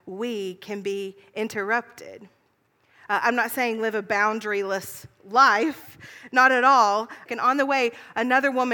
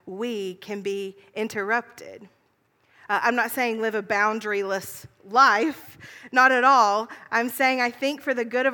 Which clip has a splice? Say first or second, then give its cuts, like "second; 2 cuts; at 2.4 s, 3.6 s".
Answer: first; 1 cut; at 7.3 s